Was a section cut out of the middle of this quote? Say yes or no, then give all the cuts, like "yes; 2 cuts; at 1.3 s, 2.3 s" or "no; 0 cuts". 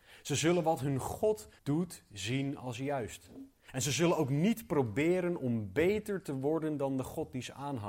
yes; 1 cut; at 1.6 s